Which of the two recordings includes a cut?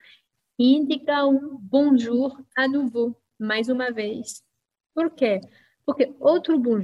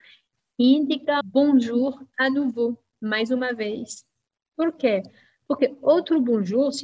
second; 1 cut; at 1.2 s

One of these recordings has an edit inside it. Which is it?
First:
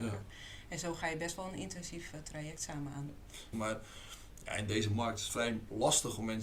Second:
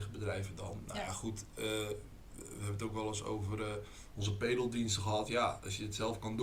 first; 1 cut; at 3.5 s

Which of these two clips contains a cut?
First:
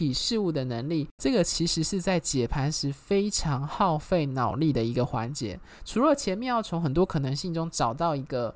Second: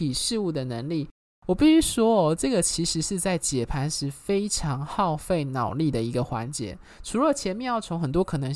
first; 1 cut; at 1.2 s

